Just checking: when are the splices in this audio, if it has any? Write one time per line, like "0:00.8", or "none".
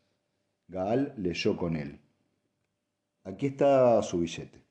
0:03.2